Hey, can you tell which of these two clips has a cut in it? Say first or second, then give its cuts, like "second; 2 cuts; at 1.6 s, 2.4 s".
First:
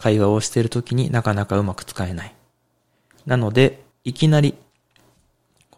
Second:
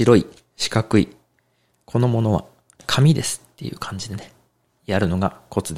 first; 1 cut; at 3.9 s